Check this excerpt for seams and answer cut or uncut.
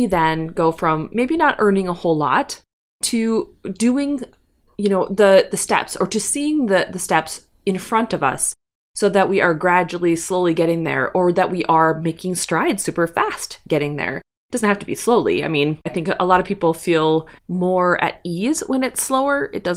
cut